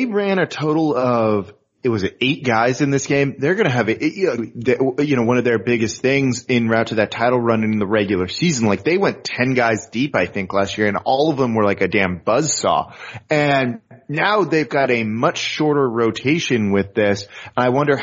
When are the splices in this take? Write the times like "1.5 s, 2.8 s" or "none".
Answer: 4.4 s